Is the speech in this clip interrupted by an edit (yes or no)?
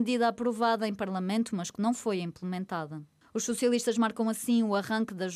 no